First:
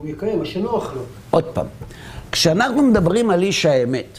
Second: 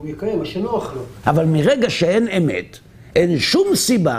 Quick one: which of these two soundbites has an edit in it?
second; 1 cut; at 1.2 s

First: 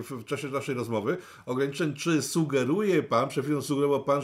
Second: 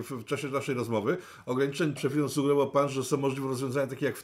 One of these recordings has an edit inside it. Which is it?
second; 1 cut; at 2.0 s

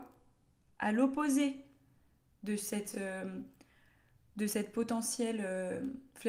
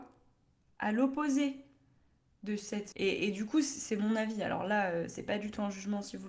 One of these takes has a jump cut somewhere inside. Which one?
second; 1 cut; at 2.9 s

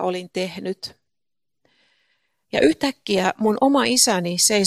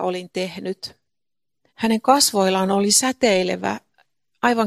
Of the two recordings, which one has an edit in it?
second; 1 cut; at 1.7 s

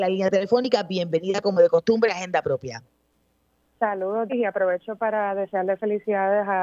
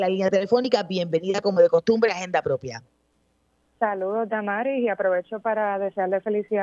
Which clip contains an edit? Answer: first; 1 cut; at 4.3 s

